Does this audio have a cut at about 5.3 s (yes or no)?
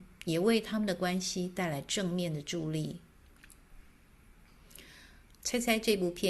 yes